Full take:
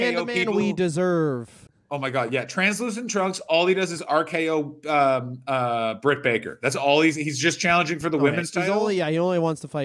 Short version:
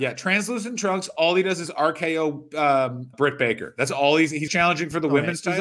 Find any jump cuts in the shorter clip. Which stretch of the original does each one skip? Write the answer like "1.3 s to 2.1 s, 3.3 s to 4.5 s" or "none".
5.4 s to 6.0 s, 7.3 s to 7.6 s